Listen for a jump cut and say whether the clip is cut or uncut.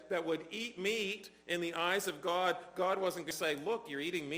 uncut